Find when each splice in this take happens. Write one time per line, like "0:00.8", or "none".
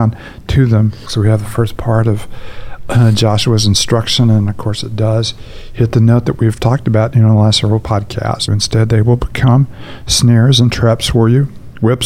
0:01.1
0:08.5